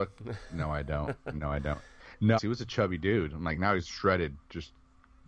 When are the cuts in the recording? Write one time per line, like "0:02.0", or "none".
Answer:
0:02.4
0:03.8